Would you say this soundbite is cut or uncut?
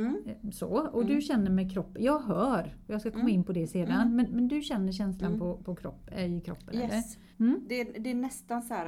cut